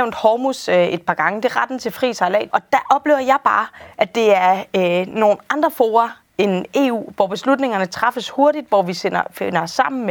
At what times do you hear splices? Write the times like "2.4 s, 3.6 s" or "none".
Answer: 2.5 s